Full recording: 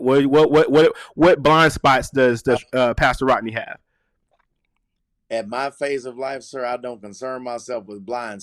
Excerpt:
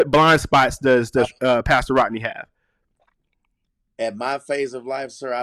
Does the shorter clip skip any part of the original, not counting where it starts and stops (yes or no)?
no